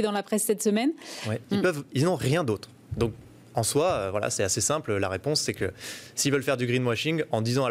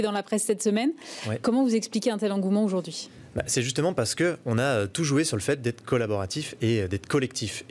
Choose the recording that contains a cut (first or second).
first